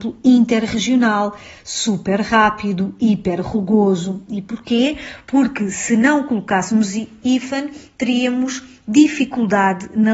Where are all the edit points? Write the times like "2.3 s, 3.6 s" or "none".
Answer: none